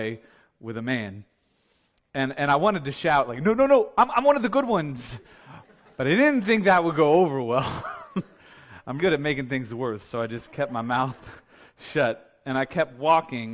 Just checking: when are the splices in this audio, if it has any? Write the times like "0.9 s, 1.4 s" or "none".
9.0 s